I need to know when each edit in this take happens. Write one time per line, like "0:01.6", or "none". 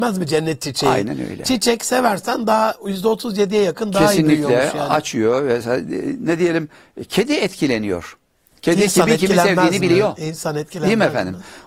none